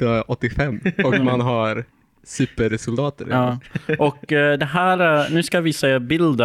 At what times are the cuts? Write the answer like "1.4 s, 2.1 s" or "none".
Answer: none